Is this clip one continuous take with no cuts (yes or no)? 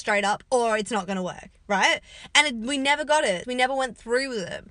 no